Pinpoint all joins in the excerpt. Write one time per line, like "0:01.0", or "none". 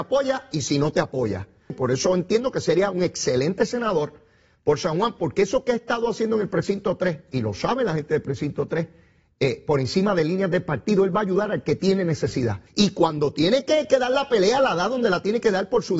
0:01.7
0:12.7